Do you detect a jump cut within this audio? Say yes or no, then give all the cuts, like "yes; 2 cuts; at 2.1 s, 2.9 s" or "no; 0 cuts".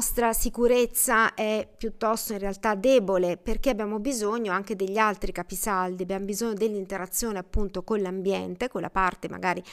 no; 0 cuts